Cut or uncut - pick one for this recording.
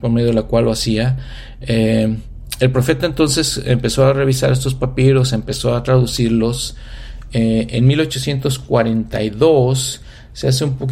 uncut